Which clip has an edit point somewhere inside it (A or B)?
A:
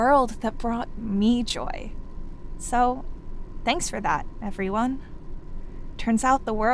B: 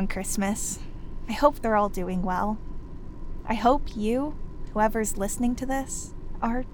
B